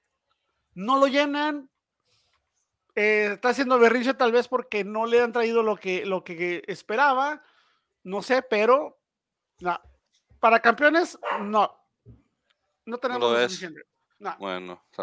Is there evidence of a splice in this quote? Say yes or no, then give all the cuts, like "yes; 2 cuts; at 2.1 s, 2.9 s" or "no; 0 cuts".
no; 0 cuts